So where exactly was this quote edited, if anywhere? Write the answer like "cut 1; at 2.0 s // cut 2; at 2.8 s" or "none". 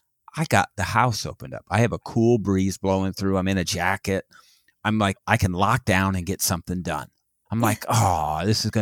cut 1; at 5.2 s // cut 2; at 7.5 s